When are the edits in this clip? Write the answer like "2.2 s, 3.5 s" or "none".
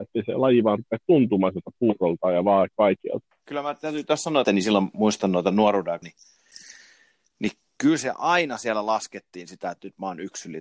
3.2 s, 4.4 s, 6.0 s